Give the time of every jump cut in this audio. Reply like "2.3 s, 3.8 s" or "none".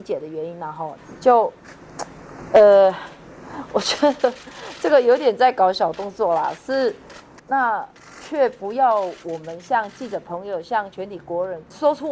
7.4 s